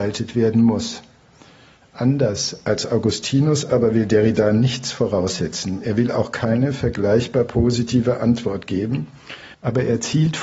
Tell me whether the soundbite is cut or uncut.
cut